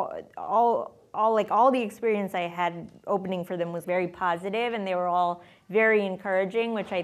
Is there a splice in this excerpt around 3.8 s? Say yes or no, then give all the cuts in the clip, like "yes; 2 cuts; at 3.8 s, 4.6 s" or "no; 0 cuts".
yes; 1 cut; at 3.8 s